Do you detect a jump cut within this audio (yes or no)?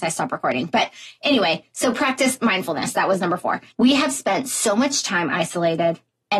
yes